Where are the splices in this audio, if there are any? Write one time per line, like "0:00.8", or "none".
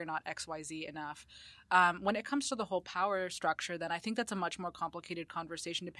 none